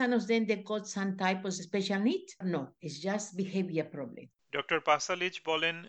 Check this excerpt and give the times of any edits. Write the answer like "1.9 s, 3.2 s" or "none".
2.4 s